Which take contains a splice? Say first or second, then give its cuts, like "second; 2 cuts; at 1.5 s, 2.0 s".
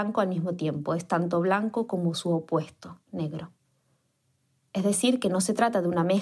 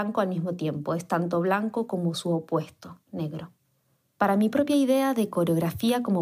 second; 1 cut; at 4.2 s